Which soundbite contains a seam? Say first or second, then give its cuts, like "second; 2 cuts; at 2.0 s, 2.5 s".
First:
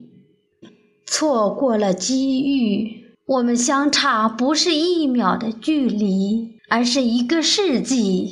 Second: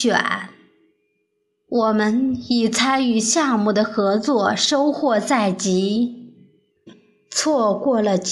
first; 2 cuts; at 3.1 s, 6.6 s